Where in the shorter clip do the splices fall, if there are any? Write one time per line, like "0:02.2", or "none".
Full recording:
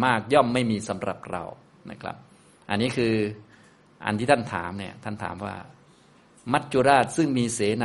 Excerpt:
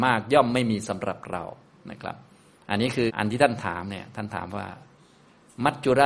0:03.1